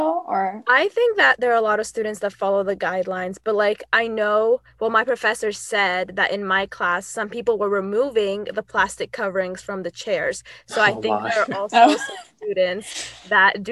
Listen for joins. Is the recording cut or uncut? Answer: uncut